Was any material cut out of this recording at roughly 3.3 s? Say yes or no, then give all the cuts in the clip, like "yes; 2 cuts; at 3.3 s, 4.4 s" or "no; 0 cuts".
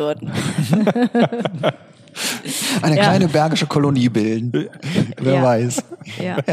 no; 0 cuts